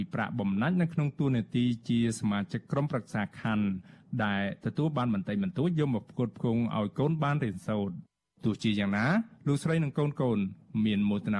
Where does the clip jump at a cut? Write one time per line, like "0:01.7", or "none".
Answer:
none